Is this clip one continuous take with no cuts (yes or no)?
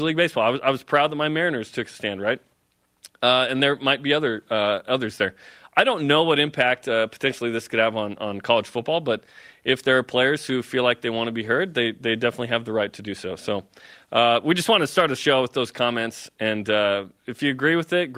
yes